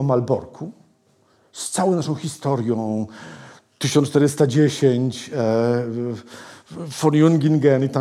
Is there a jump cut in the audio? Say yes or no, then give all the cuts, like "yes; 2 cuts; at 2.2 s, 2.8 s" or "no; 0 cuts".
no; 0 cuts